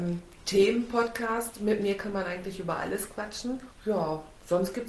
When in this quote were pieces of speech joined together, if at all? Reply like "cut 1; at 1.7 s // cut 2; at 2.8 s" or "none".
cut 1; at 3.7 s